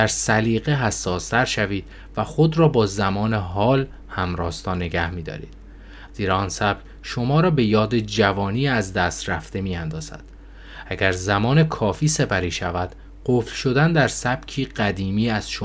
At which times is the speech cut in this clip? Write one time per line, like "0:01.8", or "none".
0:06.1